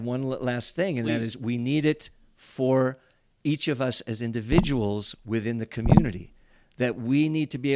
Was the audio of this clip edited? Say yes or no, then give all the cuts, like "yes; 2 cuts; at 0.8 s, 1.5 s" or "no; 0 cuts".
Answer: no; 0 cuts